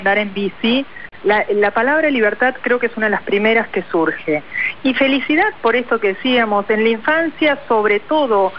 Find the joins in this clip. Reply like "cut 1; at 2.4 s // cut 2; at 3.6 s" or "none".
none